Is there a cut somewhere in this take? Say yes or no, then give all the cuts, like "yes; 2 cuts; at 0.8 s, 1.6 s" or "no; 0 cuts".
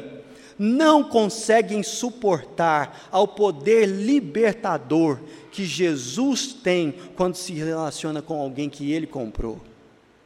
no; 0 cuts